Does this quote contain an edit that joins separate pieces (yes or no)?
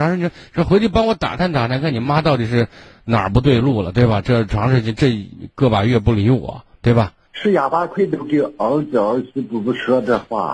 yes